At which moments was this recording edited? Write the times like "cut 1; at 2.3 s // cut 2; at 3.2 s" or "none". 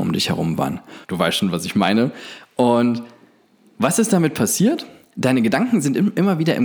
cut 1; at 1.0 s